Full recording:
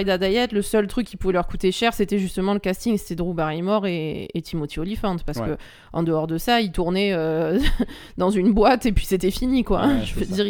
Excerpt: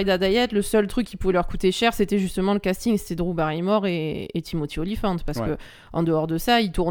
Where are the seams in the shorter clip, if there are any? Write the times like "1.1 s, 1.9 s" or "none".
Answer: none